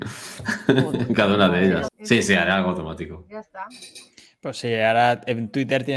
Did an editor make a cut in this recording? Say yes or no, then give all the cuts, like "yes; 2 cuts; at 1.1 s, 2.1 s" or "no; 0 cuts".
yes; 1 cut; at 1.9 s